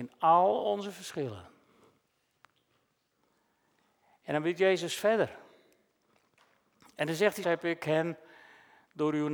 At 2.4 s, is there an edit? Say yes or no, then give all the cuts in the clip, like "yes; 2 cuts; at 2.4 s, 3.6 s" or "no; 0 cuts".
no; 1 cut; at 7.4 s